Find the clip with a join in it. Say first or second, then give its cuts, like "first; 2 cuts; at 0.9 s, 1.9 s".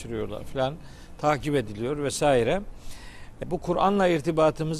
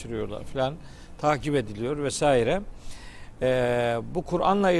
first; 1 cut; at 3.4 s